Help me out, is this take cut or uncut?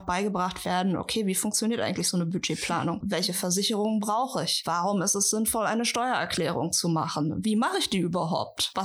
cut